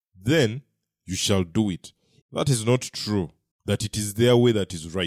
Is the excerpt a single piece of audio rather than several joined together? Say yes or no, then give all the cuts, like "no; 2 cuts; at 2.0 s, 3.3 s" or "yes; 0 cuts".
no; 2 cuts; at 2.2 s, 3.5 s